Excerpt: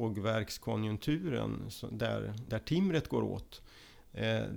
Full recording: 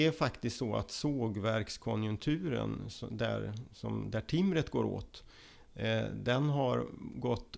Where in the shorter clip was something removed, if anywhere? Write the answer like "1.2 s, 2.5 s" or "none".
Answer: 2.5 s